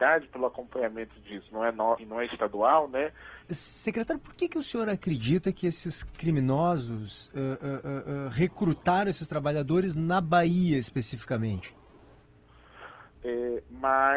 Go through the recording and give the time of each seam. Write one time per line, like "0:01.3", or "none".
0:02.0
0:03.4
0:13.1

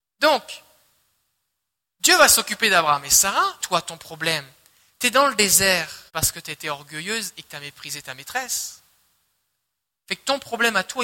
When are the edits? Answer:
0:03.6
0:06.1

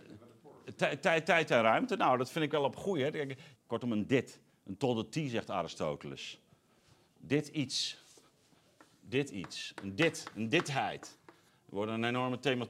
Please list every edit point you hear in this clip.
0:03.5

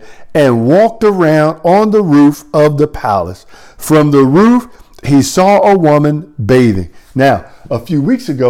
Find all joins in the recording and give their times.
none

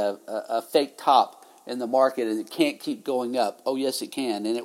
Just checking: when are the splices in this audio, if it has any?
none

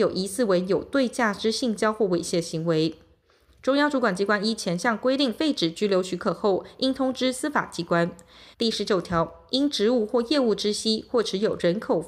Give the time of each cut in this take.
0:03.5
0:08.5

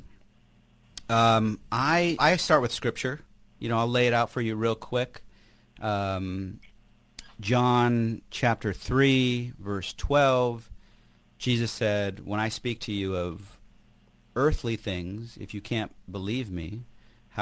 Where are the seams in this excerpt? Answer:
0:02.2

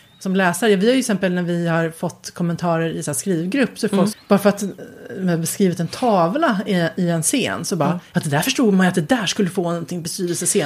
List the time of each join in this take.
0:04.1

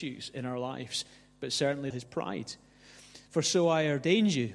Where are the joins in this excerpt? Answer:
0:01.9
0:03.3

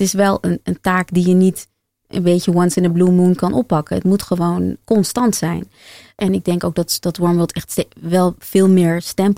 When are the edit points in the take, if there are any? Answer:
0:04.8

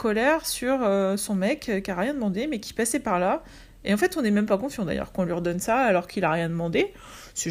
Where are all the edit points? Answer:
none

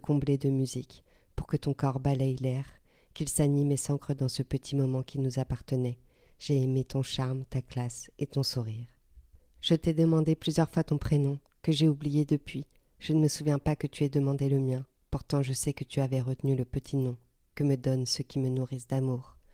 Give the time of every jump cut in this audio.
0:06.3

